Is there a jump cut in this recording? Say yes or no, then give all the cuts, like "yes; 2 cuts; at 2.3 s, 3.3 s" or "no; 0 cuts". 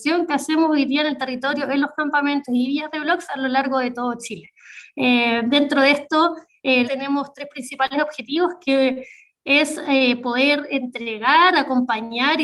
yes; 1 cut; at 6.8 s